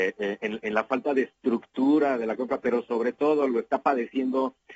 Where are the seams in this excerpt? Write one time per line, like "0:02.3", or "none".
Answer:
none